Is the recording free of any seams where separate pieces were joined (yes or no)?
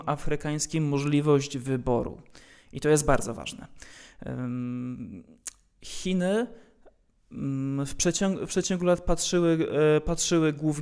yes